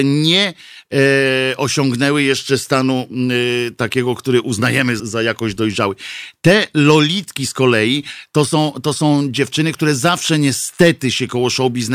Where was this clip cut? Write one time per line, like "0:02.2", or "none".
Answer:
0:05.0